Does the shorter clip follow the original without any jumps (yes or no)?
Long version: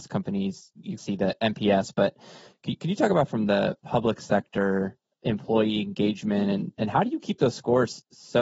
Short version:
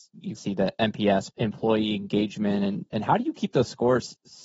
no